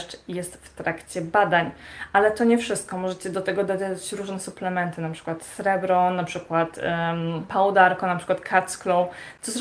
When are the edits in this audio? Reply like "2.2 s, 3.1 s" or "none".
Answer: none